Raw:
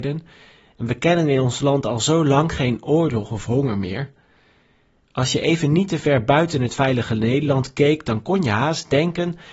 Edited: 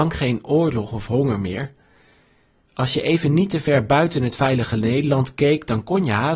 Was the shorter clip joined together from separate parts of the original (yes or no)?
no